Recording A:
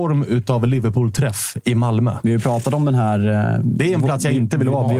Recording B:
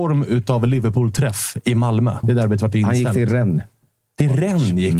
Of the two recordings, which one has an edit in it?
B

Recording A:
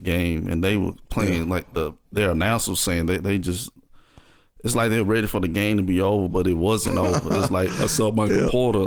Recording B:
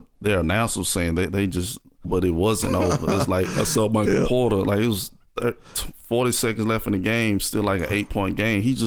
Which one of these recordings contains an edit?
B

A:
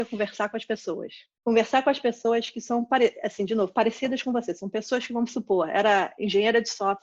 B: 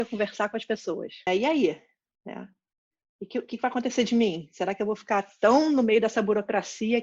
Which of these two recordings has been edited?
B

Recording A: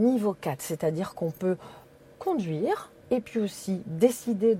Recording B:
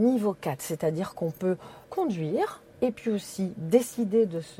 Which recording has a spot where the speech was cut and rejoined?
B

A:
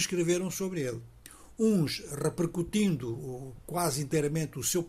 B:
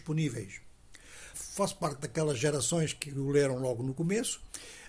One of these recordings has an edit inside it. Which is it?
B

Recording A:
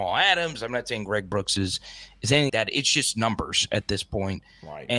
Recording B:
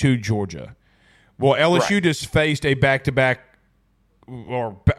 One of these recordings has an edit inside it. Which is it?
A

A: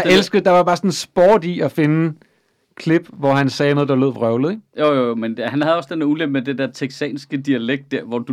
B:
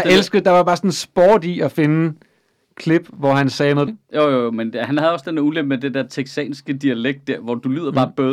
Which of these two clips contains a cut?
B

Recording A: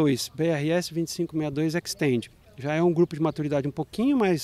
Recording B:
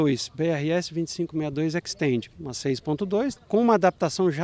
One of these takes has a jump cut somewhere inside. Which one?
B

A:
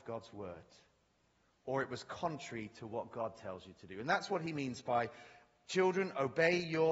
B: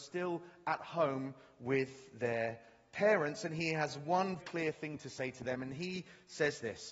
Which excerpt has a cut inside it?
B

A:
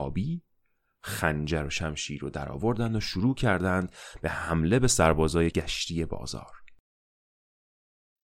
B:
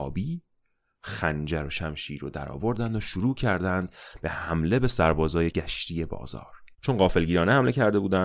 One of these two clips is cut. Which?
B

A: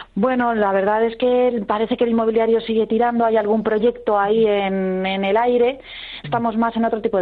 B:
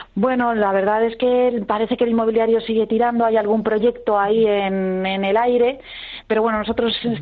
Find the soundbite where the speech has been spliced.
A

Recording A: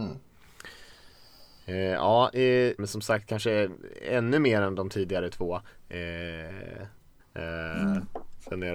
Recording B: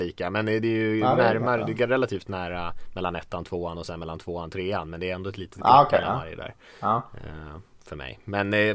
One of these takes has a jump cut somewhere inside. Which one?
A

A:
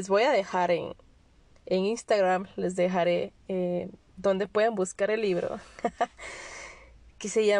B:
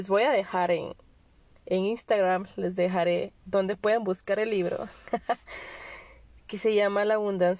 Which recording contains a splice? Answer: B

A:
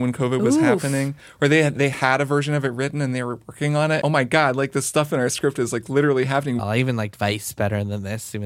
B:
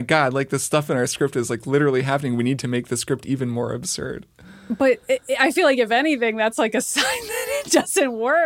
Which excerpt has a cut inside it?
A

